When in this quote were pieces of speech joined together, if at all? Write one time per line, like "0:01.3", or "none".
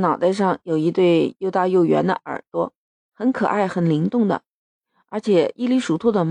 0:03.0